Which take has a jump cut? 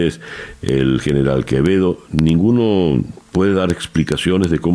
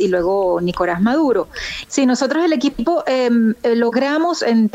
second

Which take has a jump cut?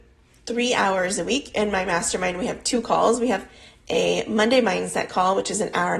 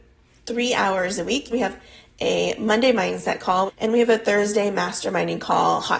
second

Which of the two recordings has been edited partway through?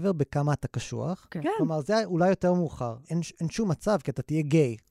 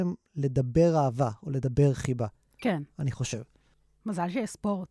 first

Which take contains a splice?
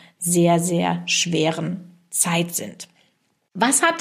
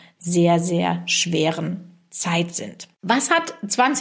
second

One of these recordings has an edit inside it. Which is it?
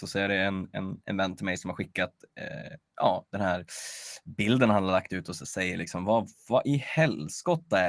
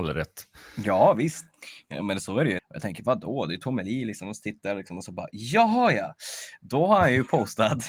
second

